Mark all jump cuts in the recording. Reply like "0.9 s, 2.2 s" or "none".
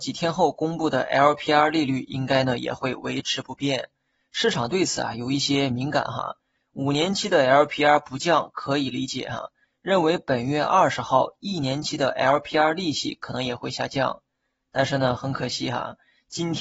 9.7 s